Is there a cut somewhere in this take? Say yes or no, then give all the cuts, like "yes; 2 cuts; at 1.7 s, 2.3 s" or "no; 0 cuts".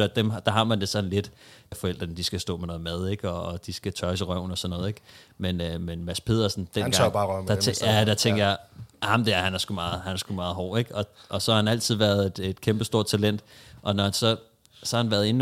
yes; 1 cut; at 1.7 s